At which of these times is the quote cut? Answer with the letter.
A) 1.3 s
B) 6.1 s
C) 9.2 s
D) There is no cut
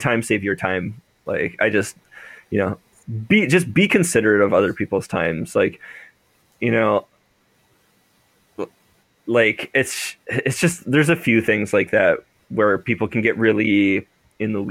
A